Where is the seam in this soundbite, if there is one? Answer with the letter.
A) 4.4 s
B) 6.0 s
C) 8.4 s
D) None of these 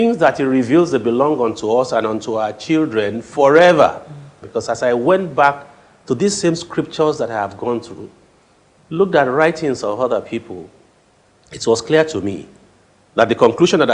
A